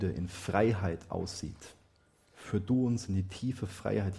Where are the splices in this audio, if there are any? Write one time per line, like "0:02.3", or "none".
0:02.2